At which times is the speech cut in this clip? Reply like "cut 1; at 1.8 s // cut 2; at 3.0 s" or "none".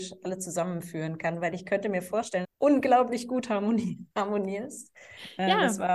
cut 1; at 2.4 s // cut 2; at 4.1 s